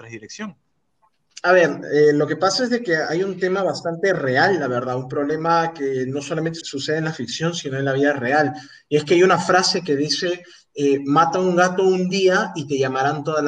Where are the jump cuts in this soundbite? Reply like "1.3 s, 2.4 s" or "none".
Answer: 6.6 s